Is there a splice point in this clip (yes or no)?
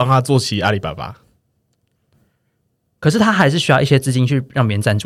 no